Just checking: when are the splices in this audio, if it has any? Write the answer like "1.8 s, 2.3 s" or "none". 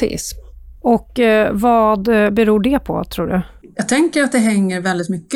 none